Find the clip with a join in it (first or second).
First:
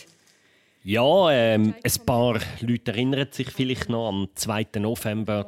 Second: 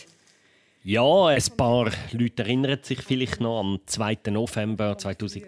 second